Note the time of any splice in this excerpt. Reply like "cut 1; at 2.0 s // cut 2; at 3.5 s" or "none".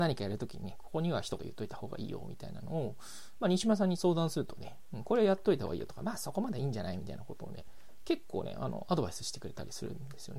cut 1; at 1.4 s